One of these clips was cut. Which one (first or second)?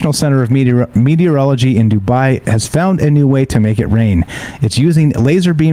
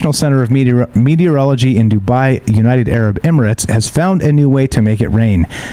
first